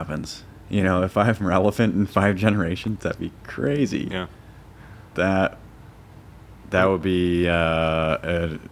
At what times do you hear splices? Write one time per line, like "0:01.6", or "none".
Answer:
0:04.1